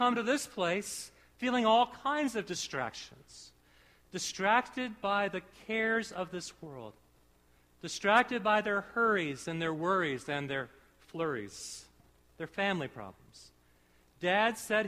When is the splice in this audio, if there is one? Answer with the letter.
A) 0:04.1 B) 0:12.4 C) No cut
B